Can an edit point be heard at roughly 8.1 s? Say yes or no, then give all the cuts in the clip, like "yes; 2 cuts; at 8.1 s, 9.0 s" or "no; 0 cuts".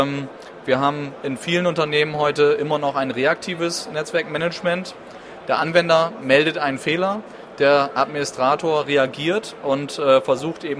no; 1 cut; at 5.4 s